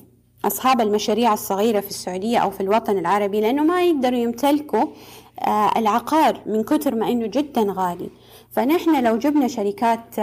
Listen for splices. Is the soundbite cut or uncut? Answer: uncut